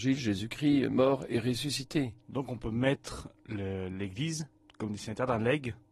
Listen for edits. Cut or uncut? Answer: uncut